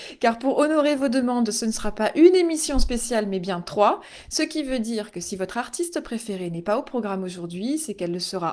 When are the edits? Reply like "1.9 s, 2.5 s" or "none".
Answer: none